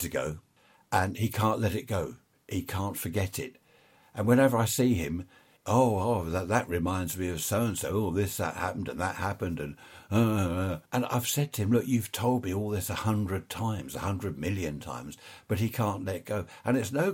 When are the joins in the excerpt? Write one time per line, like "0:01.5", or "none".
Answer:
0:10.8